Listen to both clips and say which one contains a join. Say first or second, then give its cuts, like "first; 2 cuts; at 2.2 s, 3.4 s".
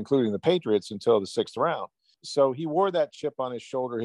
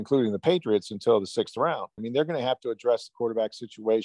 second; 1 cut; at 2.0 s